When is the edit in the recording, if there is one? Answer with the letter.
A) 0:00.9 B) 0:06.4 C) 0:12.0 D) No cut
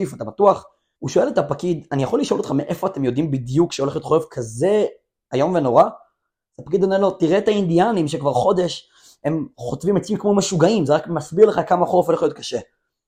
A